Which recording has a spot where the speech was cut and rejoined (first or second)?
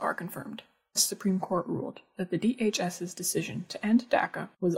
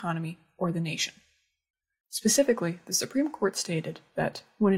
first